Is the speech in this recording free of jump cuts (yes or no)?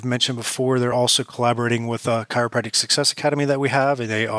yes